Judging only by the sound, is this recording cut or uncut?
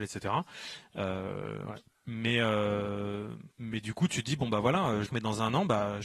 cut